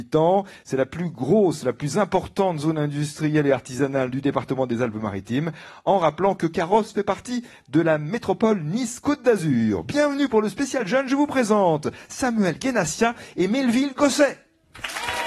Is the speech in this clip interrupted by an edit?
no; 0 cuts

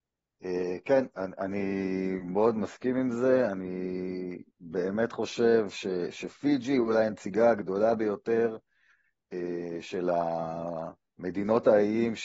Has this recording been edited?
yes; 1 cut; at 4.5 s

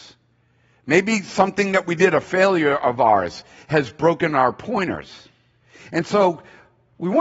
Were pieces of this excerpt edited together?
no; 0 cuts

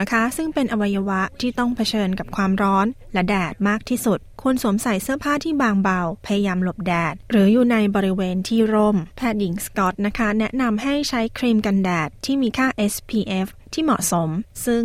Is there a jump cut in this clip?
no; 0 cuts

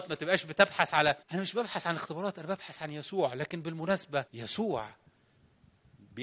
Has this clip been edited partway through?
yes; 2 cuts; at 1.2 s, 4.3 s

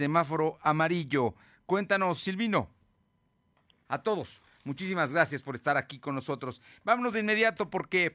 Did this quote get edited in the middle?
yes; 1 cut; at 3.9 s

